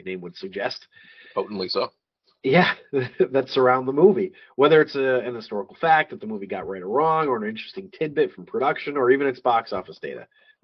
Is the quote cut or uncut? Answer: uncut